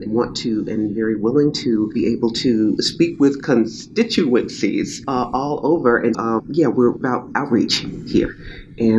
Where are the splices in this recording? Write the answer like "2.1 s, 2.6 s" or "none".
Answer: 6.1 s